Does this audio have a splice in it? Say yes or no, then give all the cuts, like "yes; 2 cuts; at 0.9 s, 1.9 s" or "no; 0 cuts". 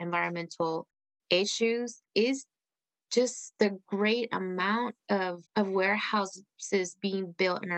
yes; 1 cut; at 5.5 s